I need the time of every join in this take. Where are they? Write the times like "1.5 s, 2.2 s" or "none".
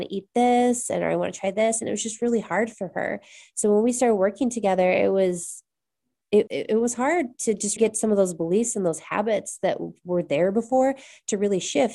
6.5 s, 7.8 s